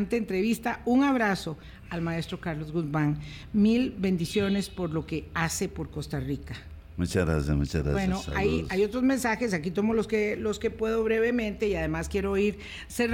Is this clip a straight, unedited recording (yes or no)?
yes